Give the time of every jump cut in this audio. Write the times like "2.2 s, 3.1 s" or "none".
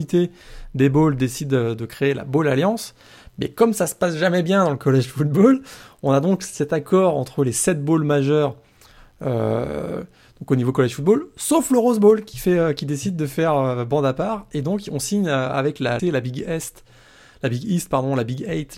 16.0 s

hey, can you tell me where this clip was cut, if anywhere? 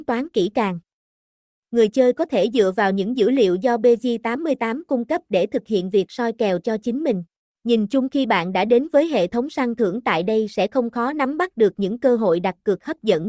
7.4 s

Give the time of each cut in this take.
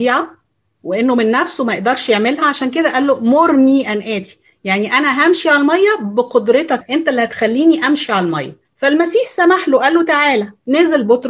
6.8 s, 8.6 s

